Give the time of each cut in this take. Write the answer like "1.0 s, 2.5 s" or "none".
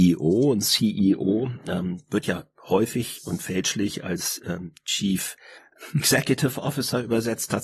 none